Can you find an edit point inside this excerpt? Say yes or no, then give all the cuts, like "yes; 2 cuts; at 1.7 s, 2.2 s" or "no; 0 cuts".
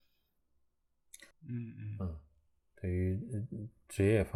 yes; 1 cut; at 1.3 s